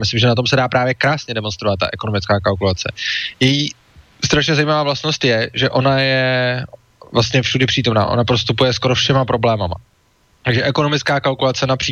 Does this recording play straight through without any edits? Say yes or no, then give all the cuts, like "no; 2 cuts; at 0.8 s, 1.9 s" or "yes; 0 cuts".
yes; 0 cuts